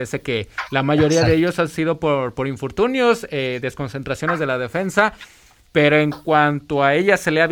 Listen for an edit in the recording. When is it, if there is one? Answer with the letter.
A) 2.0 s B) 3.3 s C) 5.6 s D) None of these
D